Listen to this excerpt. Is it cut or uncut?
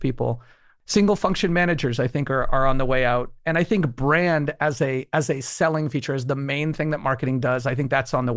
uncut